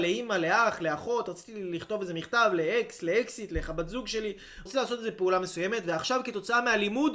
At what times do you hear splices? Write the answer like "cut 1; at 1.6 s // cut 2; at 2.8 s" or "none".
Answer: cut 1; at 4.7 s